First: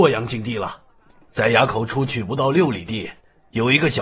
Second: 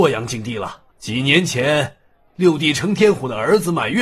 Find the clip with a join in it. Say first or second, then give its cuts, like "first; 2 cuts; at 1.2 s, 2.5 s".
second; 1 cut; at 0.9 s